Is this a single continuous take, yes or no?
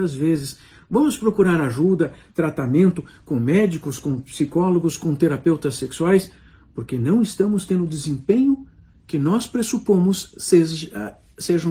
yes